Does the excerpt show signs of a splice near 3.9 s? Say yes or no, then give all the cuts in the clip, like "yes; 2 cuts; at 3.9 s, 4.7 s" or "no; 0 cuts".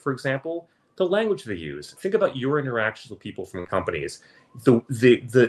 no; 1 cut; at 2.0 s